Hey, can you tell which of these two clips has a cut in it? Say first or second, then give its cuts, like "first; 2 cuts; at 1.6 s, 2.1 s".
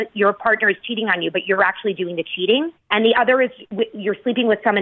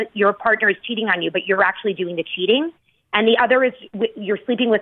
first; 1 cut; at 2.8 s